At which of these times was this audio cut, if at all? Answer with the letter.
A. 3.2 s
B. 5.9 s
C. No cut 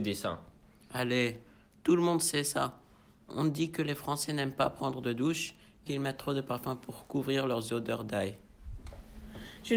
B